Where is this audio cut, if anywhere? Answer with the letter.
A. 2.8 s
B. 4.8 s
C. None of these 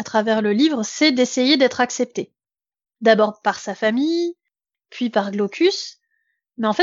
C